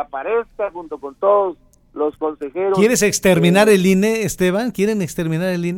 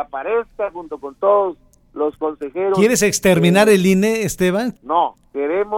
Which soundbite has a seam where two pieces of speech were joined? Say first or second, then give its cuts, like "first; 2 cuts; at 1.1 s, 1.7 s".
second; 1 cut; at 4.7 s